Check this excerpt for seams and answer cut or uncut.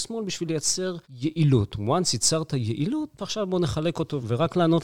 cut